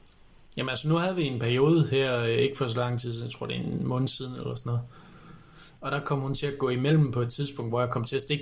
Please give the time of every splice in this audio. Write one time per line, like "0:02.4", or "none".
0:05.8